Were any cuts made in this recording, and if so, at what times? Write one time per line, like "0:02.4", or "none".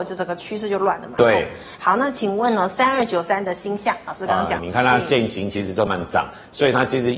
0:04.6
0:05.9